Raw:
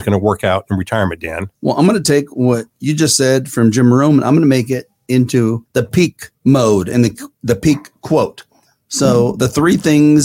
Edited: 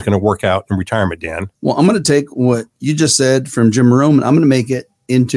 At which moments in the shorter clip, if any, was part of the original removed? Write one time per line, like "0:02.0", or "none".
none

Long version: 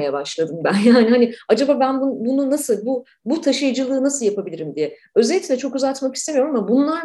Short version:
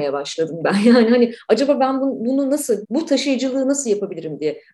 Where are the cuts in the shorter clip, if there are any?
0:02.8

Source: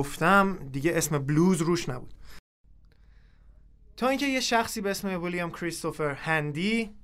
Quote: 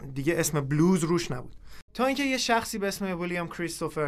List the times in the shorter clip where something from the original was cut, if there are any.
0:01.9

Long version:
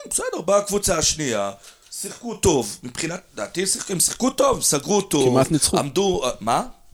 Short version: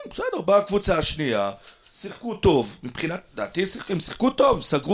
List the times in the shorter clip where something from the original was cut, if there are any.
none

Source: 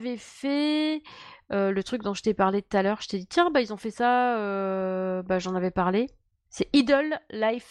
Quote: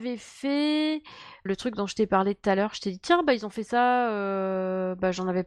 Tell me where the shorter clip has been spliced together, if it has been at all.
0:01.5

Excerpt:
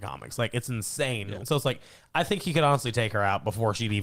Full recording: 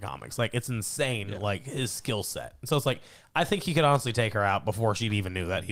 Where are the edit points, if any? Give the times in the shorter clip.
0:01.4

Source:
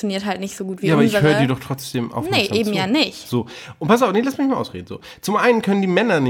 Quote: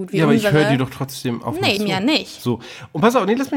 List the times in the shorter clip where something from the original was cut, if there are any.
0:01.8

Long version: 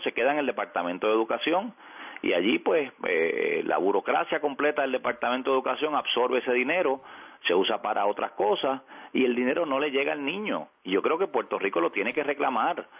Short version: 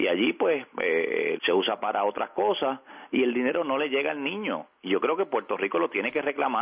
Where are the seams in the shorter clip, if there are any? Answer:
0:01.4

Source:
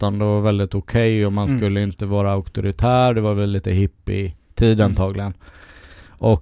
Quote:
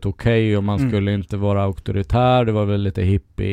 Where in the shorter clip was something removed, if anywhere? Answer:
none

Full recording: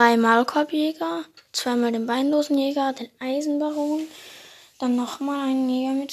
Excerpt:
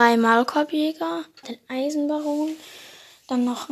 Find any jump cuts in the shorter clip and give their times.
0:01.4

